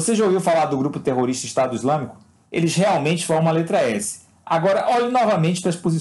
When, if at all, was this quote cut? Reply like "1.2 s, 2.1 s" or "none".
2.4 s